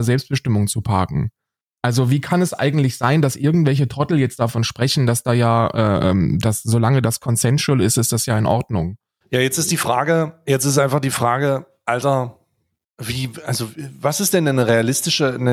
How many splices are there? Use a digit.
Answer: 2